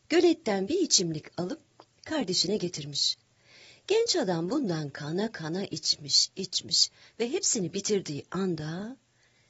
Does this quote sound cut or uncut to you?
uncut